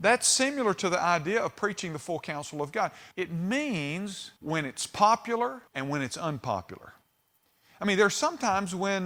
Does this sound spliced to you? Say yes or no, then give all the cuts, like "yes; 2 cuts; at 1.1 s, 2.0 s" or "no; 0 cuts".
yes; 3 cuts; at 3.1 s, 4.4 s, 5.7 s